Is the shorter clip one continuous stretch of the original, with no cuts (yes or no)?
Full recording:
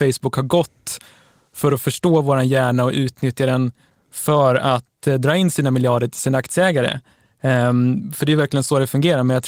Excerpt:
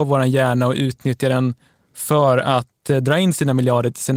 yes